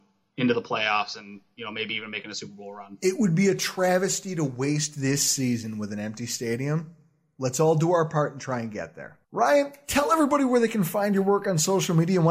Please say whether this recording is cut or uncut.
cut